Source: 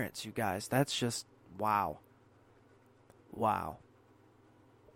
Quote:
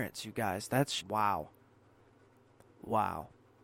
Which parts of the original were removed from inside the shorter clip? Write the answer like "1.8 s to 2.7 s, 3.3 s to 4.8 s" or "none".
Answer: 1.0 s to 1.5 s